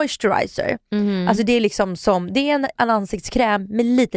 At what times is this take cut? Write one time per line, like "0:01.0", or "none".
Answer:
0:02.8